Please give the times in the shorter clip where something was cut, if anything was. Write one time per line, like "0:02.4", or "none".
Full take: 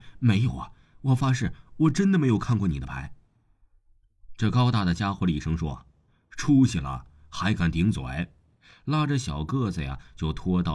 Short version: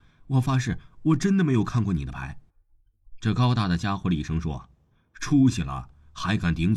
0:02.5